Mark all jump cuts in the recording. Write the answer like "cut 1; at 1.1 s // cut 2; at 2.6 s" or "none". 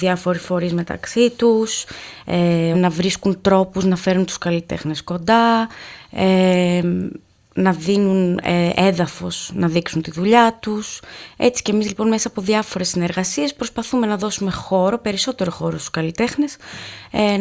cut 1; at 2.7 s